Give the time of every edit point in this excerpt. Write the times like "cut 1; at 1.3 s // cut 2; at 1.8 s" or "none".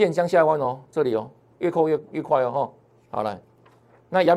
none